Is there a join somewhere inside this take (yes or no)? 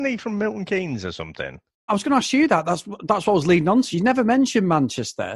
yes